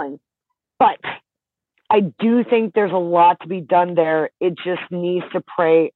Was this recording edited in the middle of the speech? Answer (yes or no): no